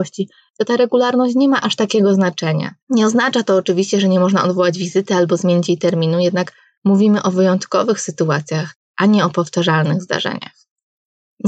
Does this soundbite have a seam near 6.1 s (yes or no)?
no